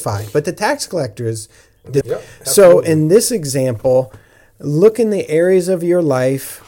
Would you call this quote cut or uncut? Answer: cut